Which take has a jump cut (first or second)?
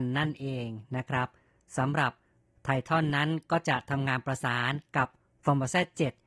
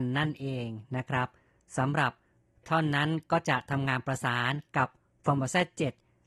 second